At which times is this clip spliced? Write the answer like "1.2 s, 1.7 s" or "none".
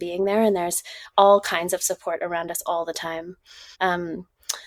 3.7 s